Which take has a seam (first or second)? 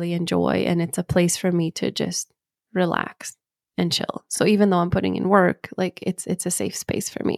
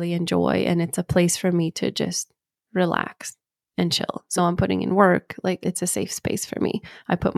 second